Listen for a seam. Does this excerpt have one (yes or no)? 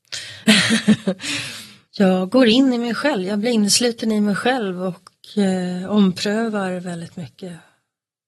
yes